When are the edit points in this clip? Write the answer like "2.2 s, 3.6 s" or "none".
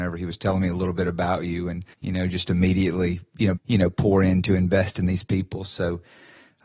1.9 s, 3.6 s